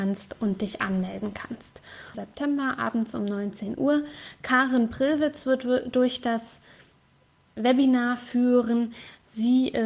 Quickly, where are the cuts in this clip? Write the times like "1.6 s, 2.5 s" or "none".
2.1 s

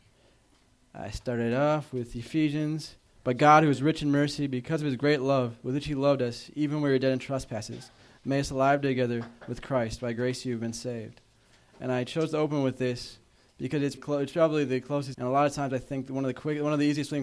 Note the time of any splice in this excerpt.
14.0 s, 15.1 s

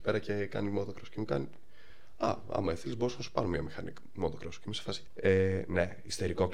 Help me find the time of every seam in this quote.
5.1 s

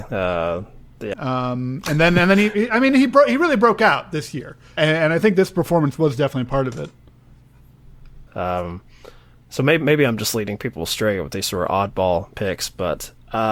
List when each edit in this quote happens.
1.1 s, 4.8 s, 8.3 s

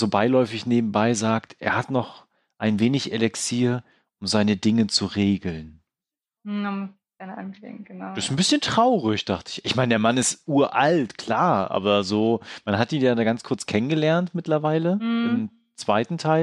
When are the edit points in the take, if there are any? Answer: none

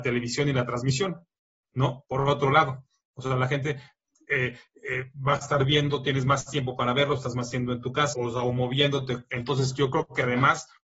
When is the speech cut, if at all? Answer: 8.1 s

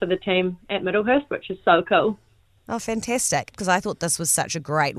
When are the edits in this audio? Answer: 3.5 s

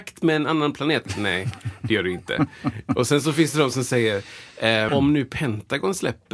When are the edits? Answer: 4.9 s

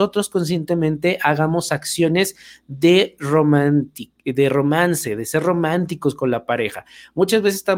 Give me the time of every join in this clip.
none

